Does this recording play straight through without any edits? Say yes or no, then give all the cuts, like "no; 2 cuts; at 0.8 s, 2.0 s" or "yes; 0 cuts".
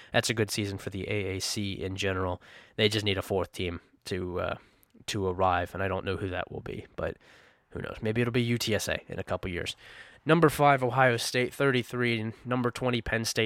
yes; 0 cuts